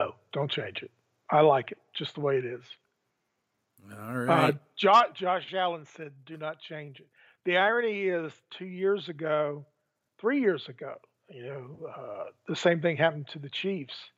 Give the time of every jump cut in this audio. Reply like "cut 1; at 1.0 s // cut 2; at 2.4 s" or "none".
none